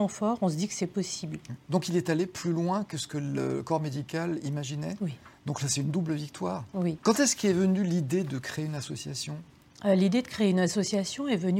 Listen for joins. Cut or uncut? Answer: cut